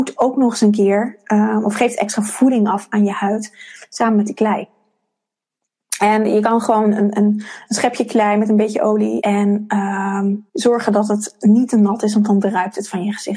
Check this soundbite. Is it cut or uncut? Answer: cut